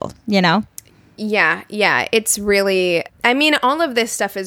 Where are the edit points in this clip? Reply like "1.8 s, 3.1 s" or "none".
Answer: 3.1 s